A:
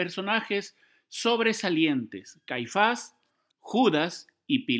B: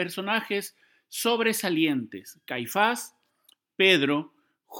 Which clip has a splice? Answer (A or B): A